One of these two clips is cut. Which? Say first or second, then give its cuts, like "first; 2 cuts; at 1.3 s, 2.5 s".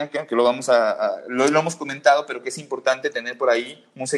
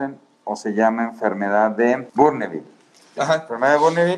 second; 1 cut; at 3.2 s